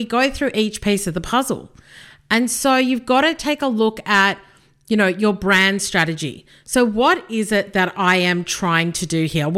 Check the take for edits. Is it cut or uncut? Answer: uncut